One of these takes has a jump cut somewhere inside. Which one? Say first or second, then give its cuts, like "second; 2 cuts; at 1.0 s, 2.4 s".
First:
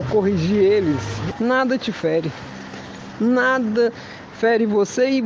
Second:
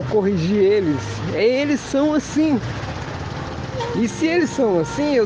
first; 1 cut; at 1.3 s